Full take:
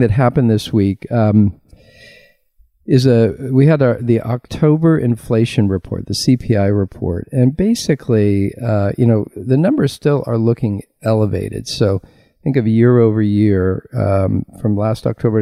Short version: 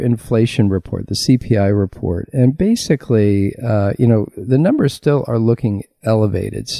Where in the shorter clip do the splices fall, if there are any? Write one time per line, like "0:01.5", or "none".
none